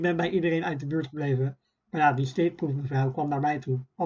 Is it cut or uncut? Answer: uncut